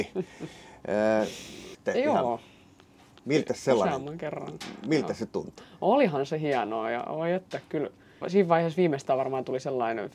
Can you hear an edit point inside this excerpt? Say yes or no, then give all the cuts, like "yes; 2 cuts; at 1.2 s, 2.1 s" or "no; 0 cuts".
yes; 2 cuts; at 1.7 s, 8.2 s